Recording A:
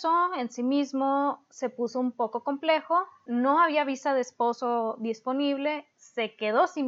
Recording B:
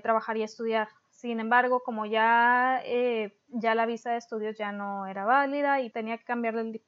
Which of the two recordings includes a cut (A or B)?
B